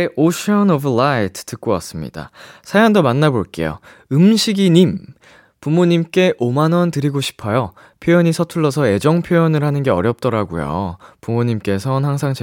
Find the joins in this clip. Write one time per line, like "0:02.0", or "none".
none